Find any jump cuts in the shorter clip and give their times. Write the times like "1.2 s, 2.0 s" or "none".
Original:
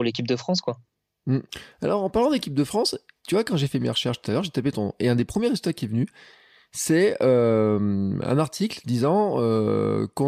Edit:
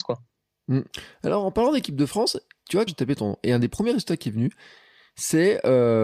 2.9 s